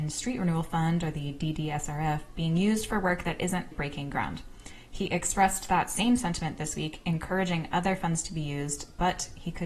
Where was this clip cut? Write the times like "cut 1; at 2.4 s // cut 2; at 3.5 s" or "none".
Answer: cut 1; at 3.7 s